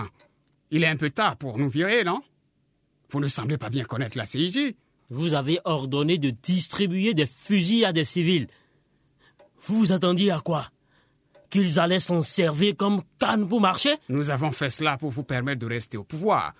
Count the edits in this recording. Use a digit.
1